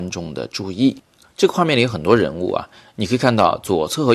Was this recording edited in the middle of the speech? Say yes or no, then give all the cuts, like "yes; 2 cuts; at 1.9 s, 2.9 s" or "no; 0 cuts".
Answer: yes; 1 cut; at 1.2 s